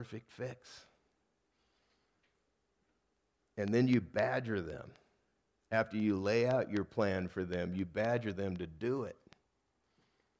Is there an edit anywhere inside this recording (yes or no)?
no